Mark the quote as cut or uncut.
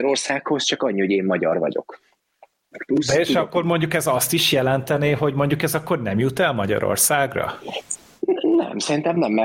uncut